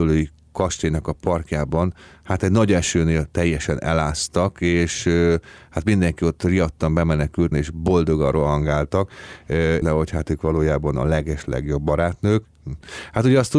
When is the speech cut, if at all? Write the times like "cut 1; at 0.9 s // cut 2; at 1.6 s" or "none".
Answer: cut 1; at 7.5 s // cut 2; at 9.8 s